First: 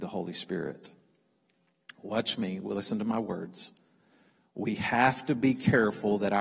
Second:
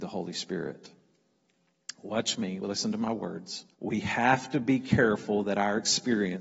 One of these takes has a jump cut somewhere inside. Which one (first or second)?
second